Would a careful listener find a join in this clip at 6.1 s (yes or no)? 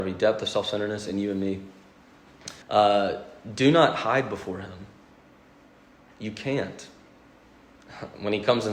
no